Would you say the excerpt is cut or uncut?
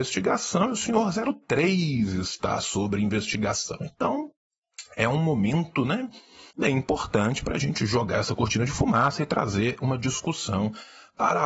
cut